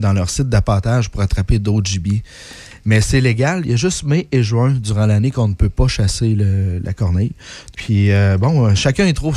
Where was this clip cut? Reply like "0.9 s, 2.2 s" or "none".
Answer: 7.7 s